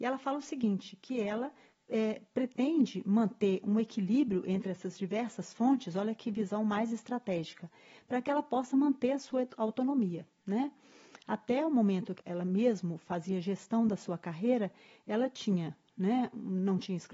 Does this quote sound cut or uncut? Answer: cut